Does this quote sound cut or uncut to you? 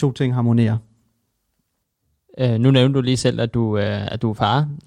uncut